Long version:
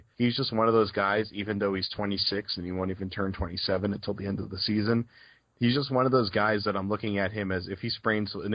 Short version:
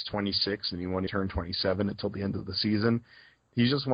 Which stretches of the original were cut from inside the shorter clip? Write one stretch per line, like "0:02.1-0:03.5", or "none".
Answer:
0:02.9-0:03.1